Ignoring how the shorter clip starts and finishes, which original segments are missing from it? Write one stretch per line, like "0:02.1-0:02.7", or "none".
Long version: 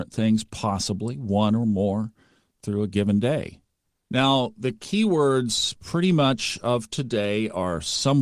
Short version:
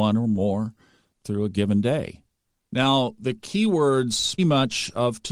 0:05.8-0:06.1